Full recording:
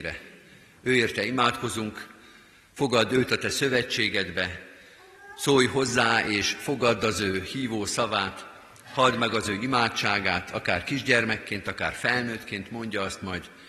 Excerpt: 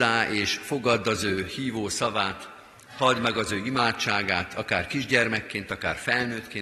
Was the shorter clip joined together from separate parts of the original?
no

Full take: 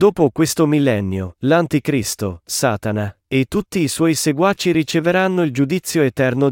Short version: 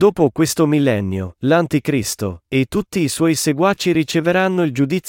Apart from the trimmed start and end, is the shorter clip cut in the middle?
yes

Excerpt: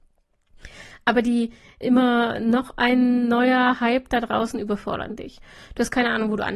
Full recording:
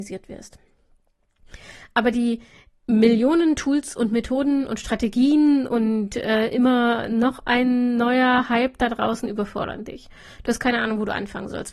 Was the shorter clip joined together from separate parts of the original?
yes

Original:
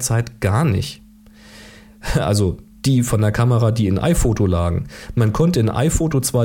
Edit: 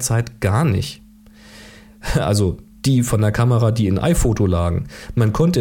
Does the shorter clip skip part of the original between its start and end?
no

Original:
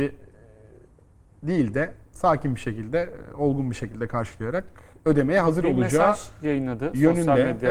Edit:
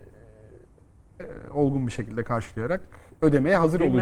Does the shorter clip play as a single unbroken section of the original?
no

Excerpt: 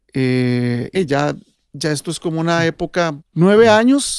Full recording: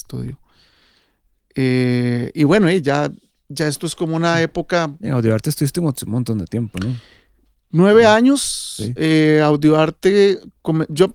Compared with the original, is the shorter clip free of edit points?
no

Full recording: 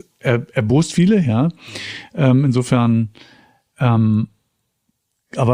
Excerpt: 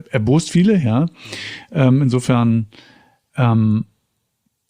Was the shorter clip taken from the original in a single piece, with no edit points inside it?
yes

